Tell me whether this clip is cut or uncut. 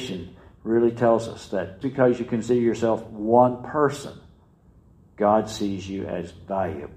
cut